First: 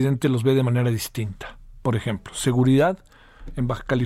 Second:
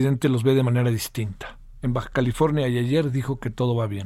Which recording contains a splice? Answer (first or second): second